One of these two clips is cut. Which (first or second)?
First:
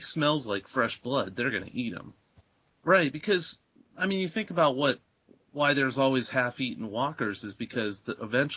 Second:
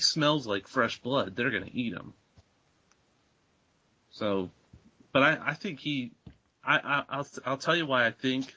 first